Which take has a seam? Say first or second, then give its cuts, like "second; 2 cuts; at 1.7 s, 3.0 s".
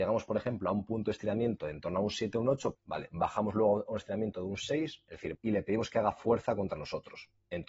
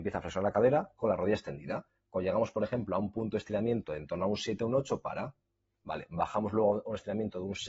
first; 2 cuts; at 2.7 s, 5.3 s